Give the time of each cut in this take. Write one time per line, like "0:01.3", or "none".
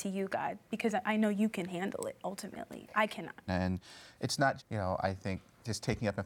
0:03.5
0:04.6

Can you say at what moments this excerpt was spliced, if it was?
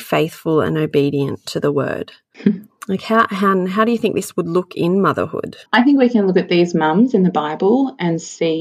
0:05.7

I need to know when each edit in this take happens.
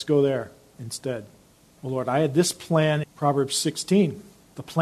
0:01.8
0:03.0

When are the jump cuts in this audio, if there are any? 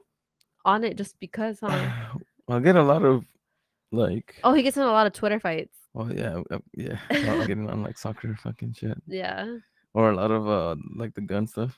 0:05.9
0:07.5

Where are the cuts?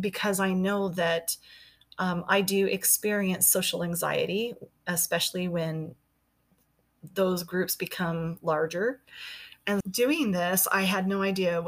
0:09.8

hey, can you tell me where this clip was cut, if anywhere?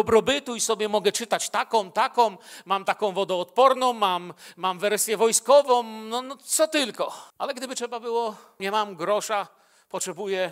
0:07.3
0:08.6

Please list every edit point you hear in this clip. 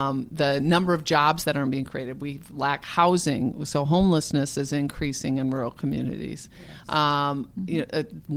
none

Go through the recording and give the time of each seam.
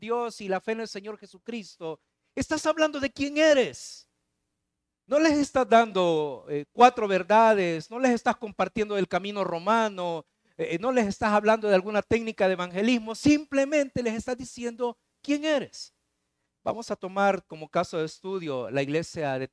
none

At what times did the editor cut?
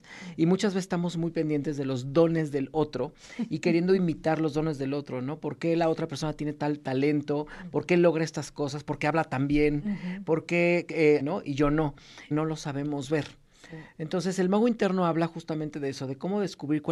0:11.2
0:12.3

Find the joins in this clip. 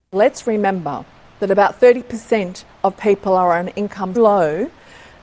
0:04.2

